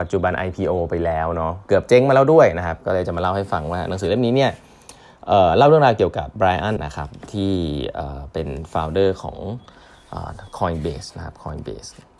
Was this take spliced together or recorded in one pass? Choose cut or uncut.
cut